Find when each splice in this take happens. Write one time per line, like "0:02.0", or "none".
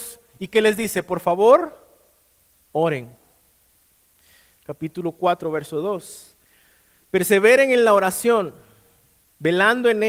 0:04.6